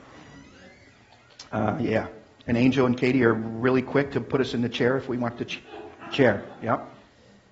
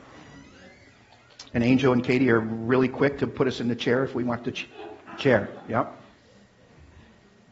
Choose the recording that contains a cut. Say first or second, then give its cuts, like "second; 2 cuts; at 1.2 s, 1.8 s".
second; 1 cut; at 1.5 s